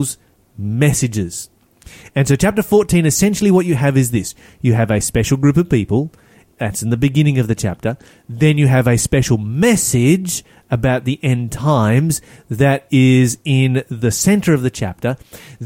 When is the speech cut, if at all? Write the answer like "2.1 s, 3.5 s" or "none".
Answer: none